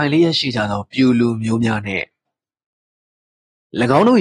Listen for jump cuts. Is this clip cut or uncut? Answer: uncut